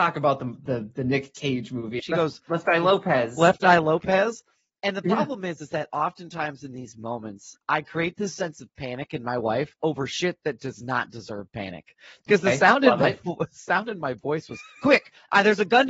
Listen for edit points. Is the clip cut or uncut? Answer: cut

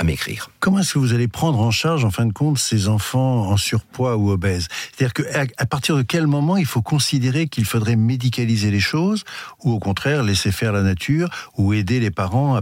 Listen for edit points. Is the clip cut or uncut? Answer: uncut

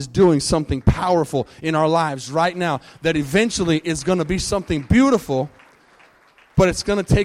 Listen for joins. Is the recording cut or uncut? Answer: uncut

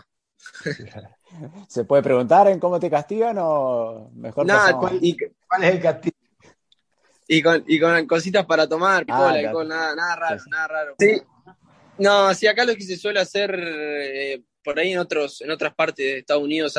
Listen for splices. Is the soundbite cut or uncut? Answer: cut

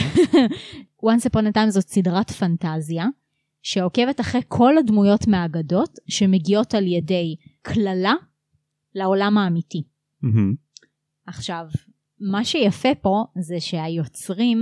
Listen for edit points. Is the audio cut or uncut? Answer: uncut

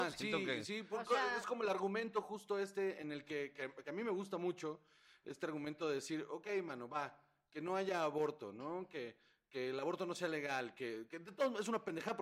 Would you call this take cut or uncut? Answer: uncut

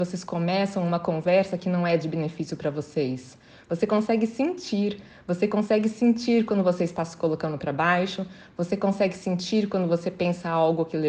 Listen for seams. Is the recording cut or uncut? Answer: uncut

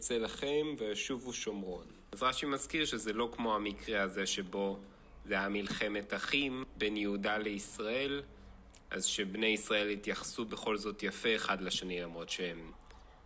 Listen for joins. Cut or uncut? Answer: uncut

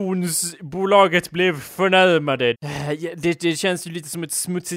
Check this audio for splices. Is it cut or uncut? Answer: cut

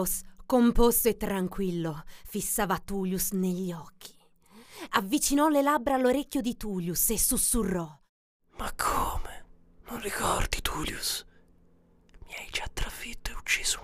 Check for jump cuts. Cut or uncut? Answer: uncut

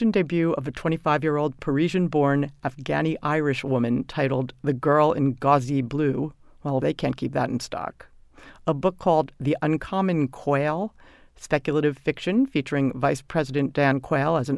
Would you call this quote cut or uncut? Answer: cut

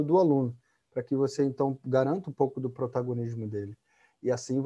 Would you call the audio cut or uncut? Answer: uncut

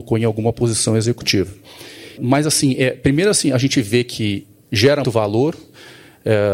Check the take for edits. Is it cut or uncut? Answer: cut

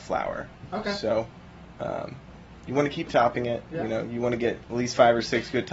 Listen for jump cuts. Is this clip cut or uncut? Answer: uncut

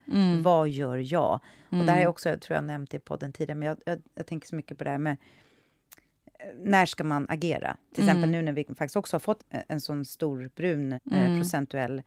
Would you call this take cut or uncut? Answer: cut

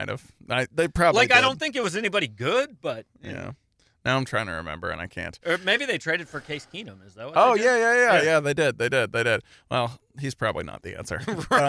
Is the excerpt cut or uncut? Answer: uncut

